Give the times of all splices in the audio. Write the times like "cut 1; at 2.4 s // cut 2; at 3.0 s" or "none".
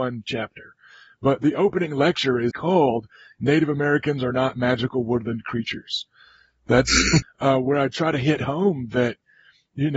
cut 1; at 2.5 s // cut 2; at 7.2 s